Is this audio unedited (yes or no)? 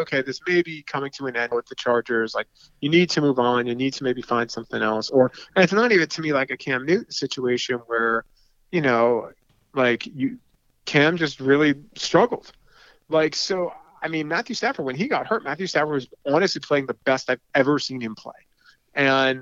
no